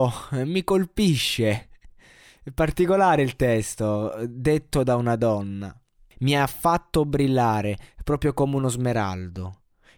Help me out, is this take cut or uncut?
cut